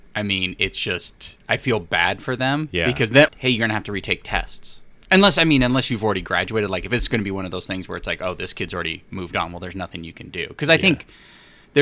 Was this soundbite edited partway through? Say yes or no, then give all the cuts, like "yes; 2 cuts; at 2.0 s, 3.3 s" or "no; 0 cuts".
yes; 2 cuts; at 3.3 s, 5.0 s